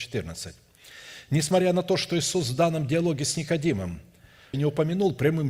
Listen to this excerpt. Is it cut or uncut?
cut